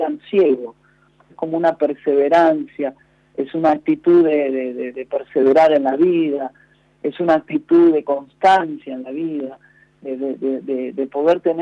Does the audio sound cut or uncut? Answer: cut